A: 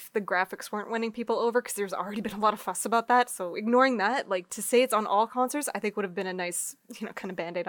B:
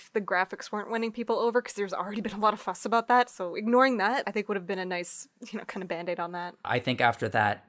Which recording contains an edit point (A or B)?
B